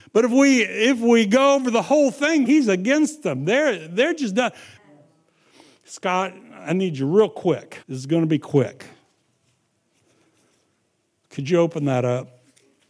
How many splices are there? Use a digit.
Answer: 3